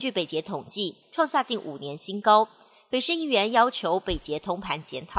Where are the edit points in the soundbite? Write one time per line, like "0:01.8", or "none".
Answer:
0:01.0